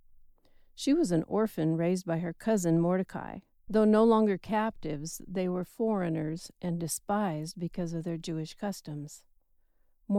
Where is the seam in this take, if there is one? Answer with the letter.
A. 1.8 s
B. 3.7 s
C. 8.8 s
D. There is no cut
B